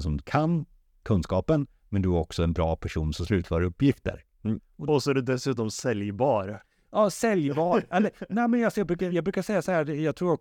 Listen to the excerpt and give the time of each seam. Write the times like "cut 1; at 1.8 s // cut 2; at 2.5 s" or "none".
none

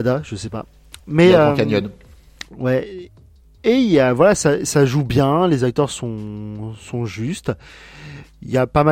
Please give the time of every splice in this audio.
none

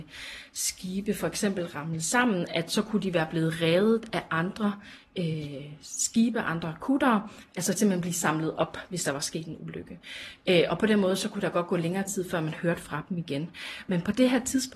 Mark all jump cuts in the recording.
none

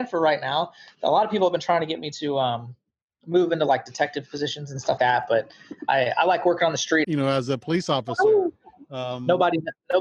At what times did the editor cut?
cut 1; at 5.0 s // cut 2; at 7.0 s

